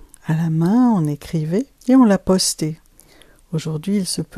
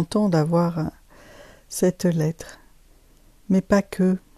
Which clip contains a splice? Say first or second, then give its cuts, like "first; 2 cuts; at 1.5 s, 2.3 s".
first; 1 cut; at 1.8 s